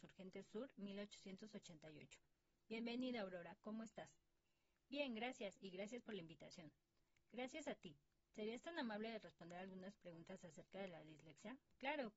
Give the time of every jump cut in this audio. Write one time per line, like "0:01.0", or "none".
none